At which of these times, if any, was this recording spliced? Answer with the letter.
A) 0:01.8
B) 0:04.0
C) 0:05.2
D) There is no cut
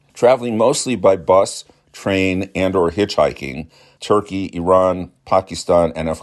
B